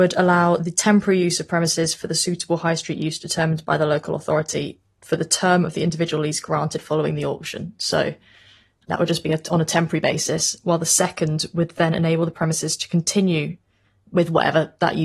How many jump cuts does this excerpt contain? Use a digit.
0